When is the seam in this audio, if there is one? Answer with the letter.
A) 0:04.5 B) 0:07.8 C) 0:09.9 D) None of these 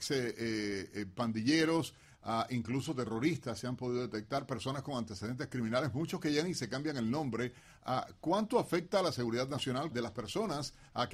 C